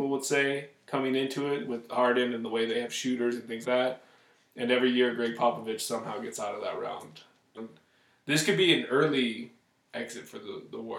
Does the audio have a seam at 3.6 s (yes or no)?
yes